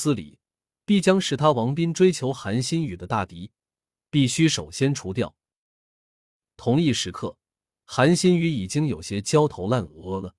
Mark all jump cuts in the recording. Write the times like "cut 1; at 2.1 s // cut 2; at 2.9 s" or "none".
none

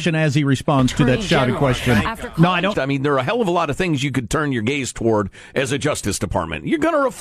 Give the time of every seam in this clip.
cut 1; at 2.7 s

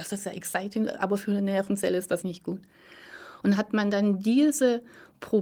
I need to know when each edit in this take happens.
cut 1; at 2.2 s // cut 2; at 3.4 s

